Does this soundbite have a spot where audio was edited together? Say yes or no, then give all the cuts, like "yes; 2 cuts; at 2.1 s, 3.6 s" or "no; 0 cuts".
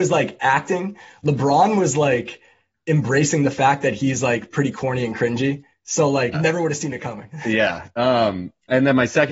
yes; 1 cut; at 6.3 s